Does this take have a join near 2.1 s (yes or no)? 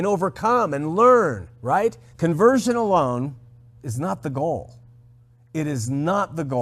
yes